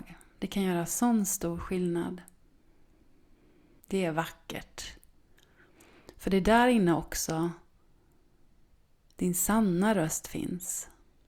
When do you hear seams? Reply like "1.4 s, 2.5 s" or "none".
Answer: 3.8 s

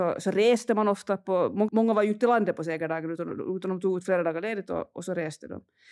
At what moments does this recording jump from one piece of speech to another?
1.7 s

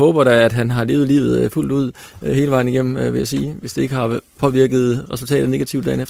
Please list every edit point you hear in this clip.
none

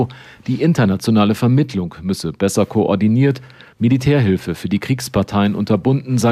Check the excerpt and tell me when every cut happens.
none

